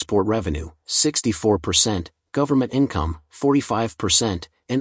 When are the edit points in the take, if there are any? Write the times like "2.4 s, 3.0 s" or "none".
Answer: none